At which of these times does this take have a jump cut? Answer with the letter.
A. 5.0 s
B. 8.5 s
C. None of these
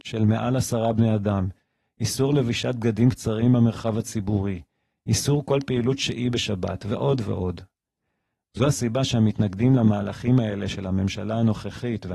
C